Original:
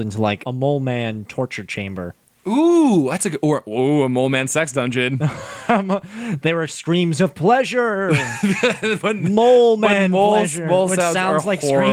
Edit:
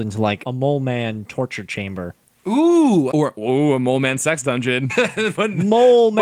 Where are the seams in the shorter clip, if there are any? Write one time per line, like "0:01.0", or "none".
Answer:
0:03.1
0:04.9